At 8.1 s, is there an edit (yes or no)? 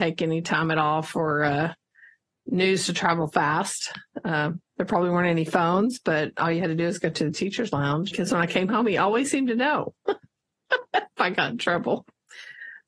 yes